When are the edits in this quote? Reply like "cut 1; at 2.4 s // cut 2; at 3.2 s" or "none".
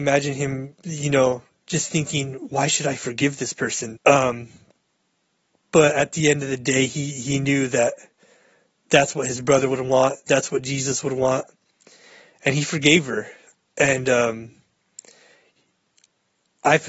cut 1; at 4.0 s